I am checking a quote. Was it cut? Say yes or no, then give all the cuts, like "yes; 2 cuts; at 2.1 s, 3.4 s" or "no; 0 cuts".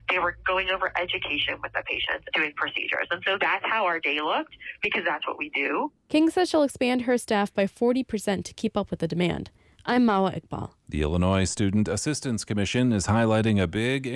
yes; 1 cut; at 2.3 s